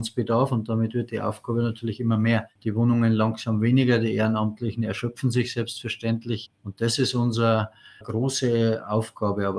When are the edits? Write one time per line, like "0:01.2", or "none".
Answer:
0:06.5
0:08.0